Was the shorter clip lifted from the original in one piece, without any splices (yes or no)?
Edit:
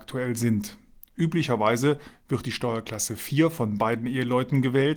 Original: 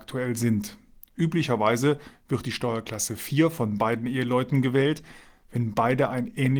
yes